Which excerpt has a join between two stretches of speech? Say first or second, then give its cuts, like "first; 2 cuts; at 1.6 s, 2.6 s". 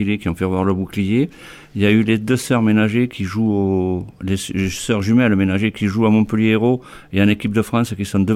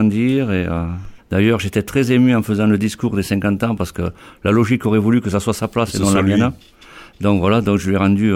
second; 1 cut; at 1.2 s